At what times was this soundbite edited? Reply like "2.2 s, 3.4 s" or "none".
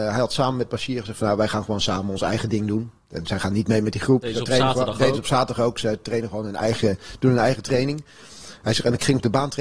none